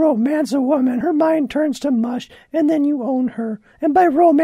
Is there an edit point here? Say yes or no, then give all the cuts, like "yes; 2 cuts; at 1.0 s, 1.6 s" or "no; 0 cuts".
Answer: no; 0 cuts